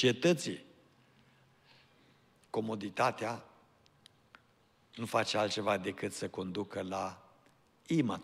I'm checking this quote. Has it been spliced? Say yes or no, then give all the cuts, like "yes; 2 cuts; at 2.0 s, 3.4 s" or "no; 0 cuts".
no; 0 cuts